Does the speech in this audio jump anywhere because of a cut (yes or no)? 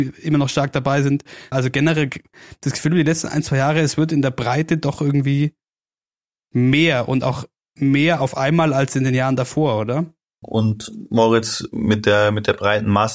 yes